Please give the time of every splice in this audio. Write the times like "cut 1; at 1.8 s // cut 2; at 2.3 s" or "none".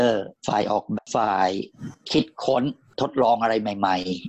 cut 1; at 0.9 s